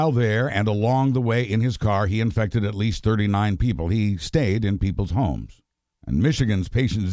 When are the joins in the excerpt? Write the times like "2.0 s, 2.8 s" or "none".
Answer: 5.9 s

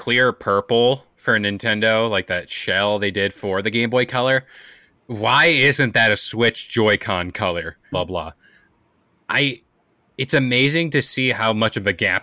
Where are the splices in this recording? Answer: 7.9 s

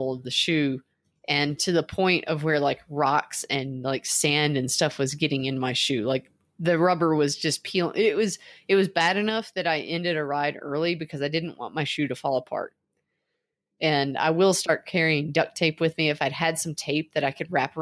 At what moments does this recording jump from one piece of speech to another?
none

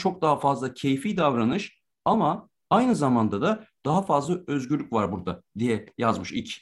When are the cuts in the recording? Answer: none

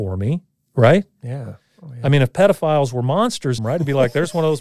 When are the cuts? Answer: 3.6 s

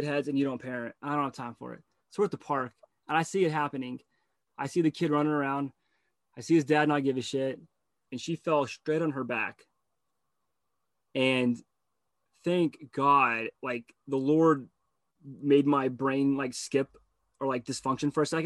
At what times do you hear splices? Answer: 8.1 s

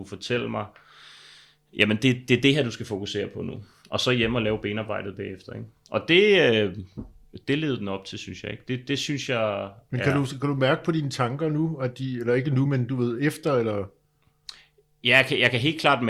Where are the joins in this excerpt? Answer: none

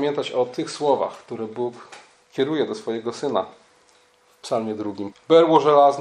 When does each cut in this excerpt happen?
5.1 s

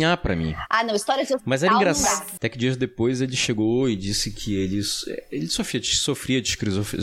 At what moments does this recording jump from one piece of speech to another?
2.4 s

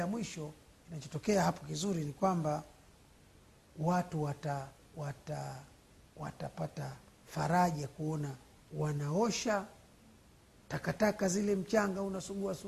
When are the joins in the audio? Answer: none

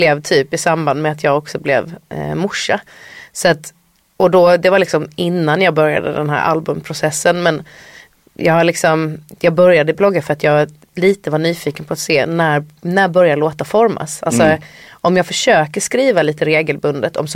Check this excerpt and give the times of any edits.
none

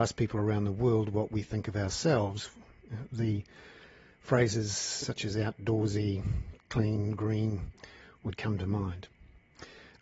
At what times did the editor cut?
5.0 s

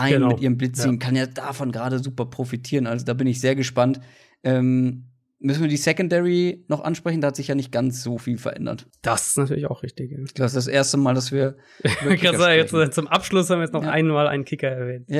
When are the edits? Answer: 8.9 s

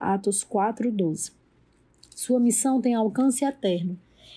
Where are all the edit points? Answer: none

